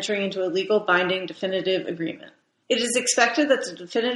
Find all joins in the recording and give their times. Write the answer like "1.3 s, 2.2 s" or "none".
2.6 s